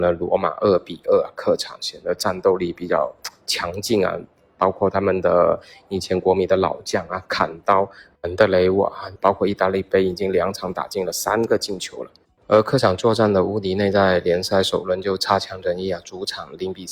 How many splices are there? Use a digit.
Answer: 1